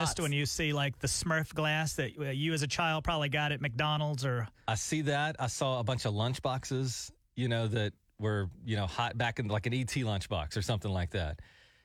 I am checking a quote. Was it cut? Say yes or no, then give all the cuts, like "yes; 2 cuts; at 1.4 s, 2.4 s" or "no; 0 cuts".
no; 0 cuts